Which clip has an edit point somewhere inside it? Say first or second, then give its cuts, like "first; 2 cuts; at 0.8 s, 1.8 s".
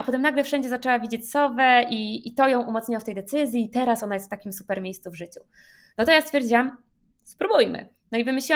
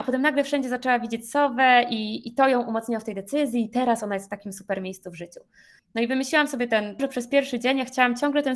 second; 2 cuts; at 5.8 s, 7.0 s